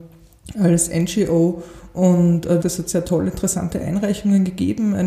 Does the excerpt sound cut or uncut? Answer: cut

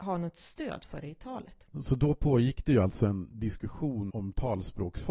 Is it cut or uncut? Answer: cut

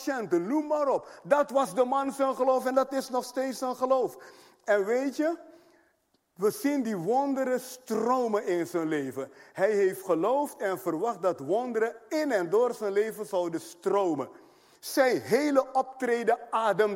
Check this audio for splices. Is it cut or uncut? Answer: uncut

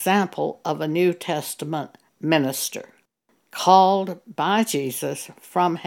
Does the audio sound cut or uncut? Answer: uncut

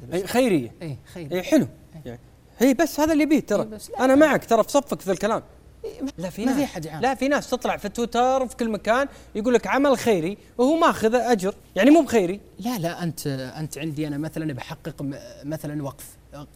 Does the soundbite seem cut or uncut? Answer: cut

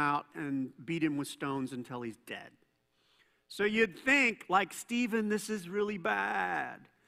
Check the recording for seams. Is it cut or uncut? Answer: uncut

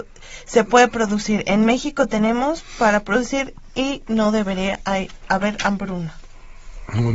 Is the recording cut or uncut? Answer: uncut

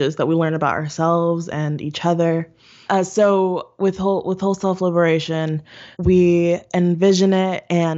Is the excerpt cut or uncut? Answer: cut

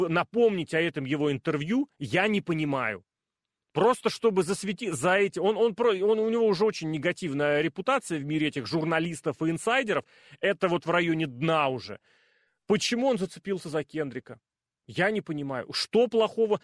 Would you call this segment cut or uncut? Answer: uncut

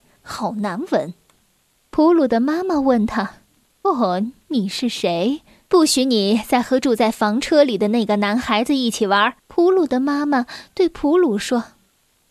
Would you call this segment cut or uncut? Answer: cut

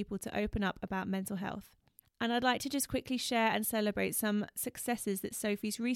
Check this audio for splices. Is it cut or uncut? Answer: cut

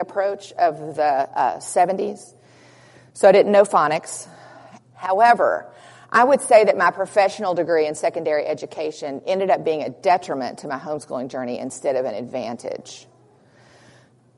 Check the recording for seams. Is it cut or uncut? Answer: cut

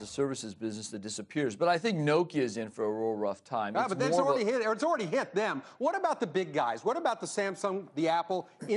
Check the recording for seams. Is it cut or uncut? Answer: uncut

